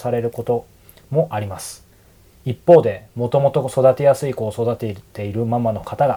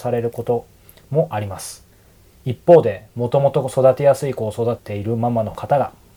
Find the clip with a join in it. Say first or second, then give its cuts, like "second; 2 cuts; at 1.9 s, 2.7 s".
second; 1 cut; at 4.8 s